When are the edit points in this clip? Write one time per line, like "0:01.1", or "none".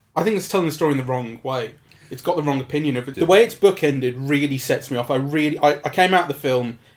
0:03.1